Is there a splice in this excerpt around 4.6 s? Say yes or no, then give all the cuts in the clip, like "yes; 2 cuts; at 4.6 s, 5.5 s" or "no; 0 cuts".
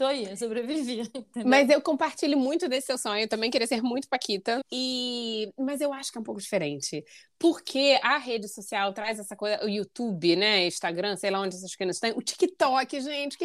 yes; 1 cut; at 4.6 s